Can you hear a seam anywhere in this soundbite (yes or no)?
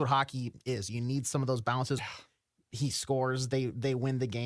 yes